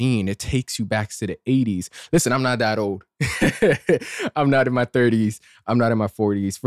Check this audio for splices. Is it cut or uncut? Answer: uncut